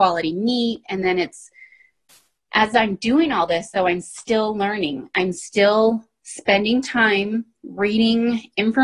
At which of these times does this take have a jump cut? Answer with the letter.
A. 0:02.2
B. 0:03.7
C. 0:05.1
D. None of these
D